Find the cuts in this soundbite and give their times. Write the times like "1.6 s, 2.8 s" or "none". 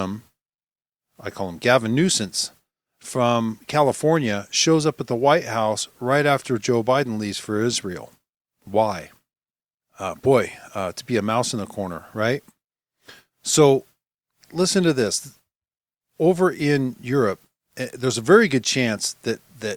none

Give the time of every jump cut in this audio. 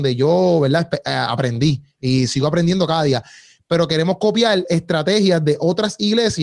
none

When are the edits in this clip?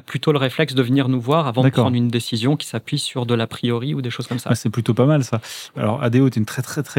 5.7 s

